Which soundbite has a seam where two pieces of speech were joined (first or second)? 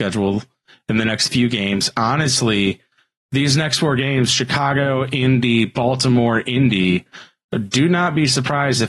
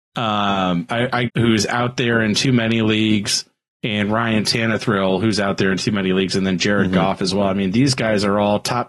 second